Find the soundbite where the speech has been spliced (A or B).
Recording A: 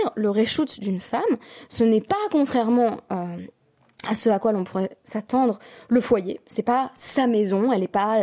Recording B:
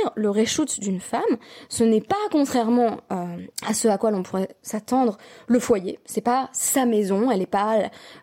B